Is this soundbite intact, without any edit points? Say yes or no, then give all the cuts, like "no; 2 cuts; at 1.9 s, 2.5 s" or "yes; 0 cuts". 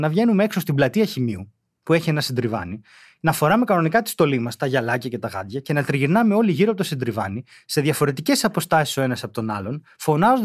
yes; 0 cuts